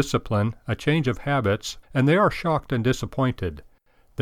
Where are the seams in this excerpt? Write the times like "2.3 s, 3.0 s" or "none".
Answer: 1.8 s